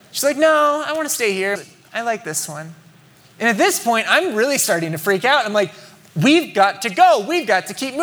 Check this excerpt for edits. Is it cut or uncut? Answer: cut